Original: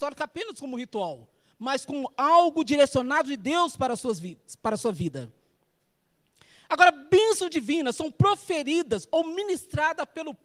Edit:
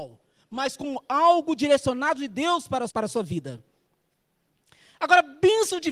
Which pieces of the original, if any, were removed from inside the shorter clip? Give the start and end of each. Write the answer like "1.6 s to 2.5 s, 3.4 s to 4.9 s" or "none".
4.0 s to 4.6 s